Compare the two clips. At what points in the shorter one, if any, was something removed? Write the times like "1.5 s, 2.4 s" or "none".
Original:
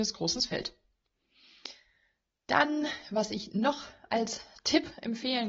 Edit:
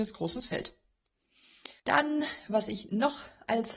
1.8 s